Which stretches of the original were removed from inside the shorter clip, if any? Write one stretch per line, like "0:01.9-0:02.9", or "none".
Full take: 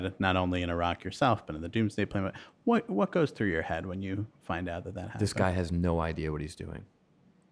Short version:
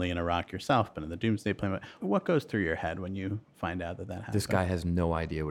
0:02.5-0:02.9